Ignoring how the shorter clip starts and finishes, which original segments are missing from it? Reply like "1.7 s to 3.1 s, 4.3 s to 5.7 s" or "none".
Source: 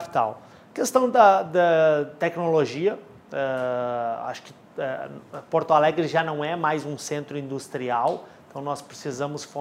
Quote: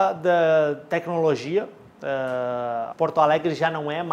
4.2 s to 5.4 s